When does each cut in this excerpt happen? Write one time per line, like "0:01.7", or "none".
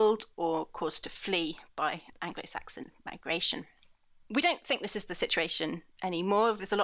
none

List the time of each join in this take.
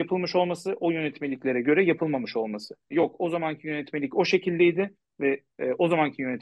0:02.9

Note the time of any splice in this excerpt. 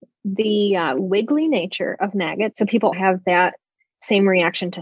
0:02.9

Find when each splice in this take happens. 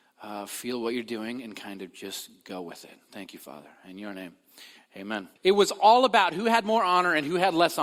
0:05.4

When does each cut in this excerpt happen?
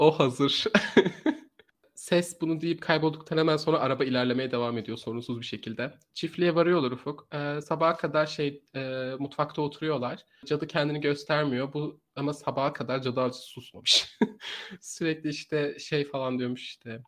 none

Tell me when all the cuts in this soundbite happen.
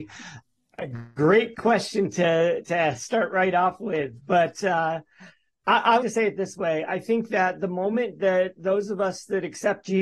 0:06.0

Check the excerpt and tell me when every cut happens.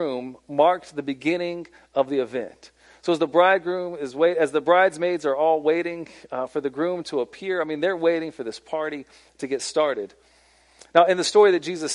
none

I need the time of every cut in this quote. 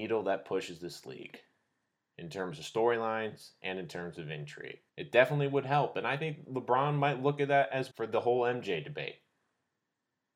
0:04.9
0:07.9

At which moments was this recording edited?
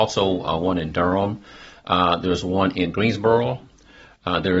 none

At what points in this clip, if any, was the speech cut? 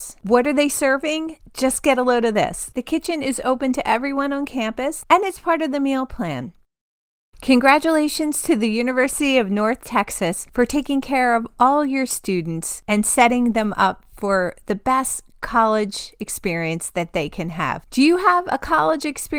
0:02.7
0:05.0

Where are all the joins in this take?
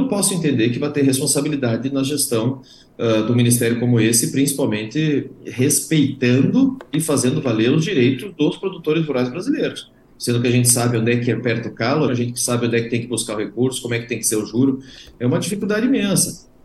0:10.1
0:12.1

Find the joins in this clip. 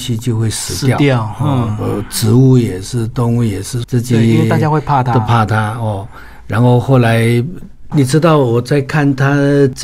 0:03.8
0:07.9

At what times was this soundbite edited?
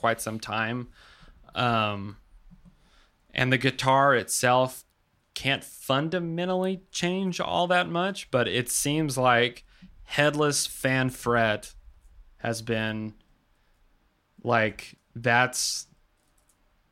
none

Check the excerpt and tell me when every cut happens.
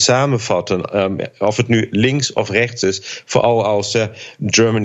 none

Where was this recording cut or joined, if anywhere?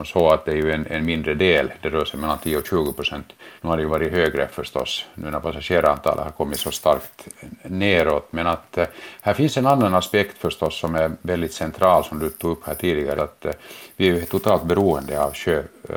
0:03.6
0:13.2

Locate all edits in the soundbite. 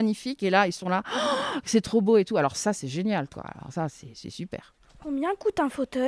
none

